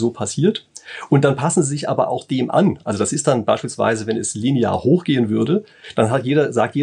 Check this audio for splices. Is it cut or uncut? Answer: uncut